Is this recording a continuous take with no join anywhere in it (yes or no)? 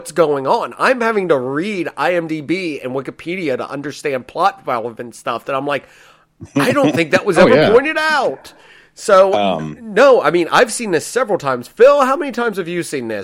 yes